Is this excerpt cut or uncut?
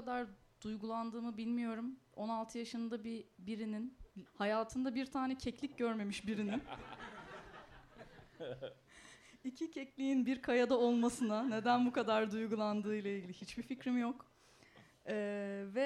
cut